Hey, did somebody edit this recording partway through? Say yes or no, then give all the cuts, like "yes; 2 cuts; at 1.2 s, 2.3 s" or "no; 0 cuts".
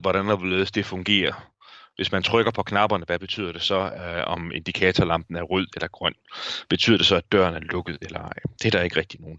no; 0 cuts